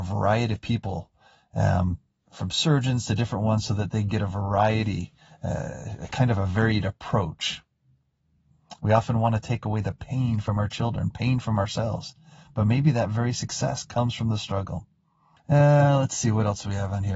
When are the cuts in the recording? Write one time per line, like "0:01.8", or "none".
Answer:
0:08.8
0:15.4